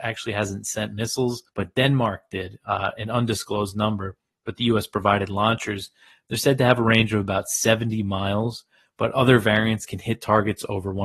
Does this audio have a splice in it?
yes; 1 cut; at 1.5 s

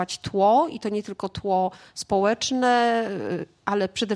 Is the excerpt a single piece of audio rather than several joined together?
yes; 0 cuts

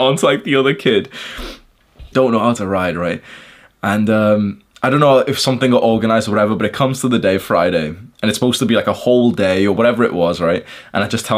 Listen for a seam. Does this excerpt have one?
yes; 1 cut; at 2.1 s

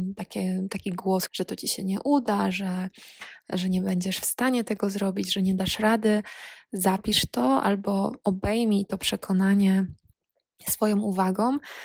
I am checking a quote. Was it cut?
yes; 2 cuts; at 1.3 s, 2.5 s

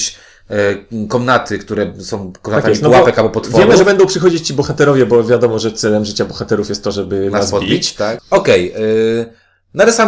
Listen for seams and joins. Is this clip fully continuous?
no; 1 cut; at 8.2 s

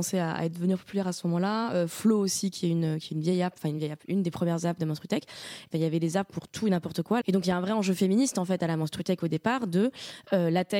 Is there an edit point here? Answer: yes; 2 cuts; at 5.7 s, 7.2 s

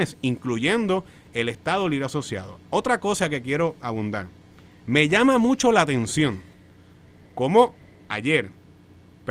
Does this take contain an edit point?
no; 0 cuts

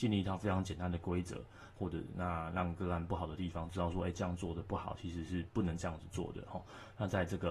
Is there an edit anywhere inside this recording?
yes; 1 cut; at 1.8 s

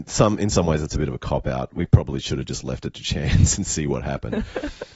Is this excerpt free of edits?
yes; 0 cuts

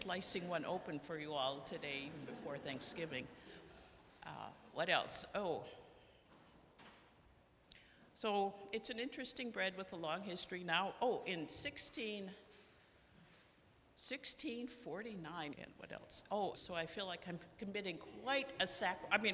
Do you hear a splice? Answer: yes; 2 cuts; at 15.5 s, 16.5 s

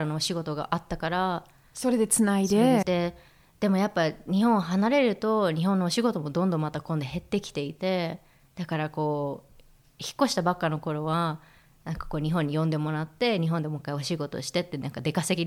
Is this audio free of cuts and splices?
no; 1 cut; at 2.8 s

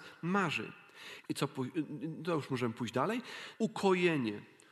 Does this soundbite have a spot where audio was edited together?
yes; 2 cuts; at 1.2 s, 3.5 s

